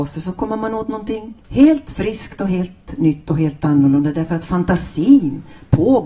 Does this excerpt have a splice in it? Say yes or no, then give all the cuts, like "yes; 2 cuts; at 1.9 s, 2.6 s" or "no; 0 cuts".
yes; 1 cut; at 1.4 s